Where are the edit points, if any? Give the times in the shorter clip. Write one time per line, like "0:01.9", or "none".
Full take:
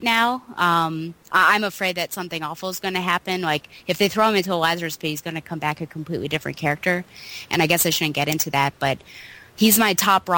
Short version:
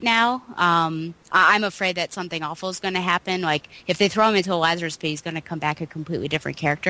none